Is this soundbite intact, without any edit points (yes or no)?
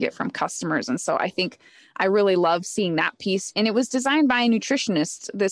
yes